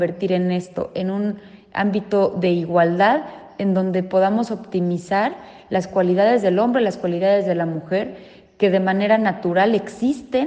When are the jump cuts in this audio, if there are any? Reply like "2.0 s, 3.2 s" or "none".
none